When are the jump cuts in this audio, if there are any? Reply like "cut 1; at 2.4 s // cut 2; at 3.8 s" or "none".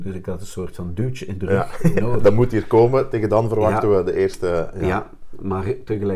none